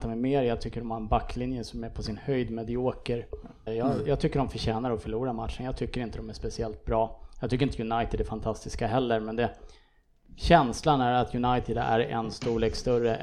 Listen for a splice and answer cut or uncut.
cut